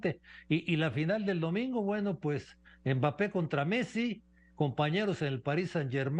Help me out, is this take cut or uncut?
uncut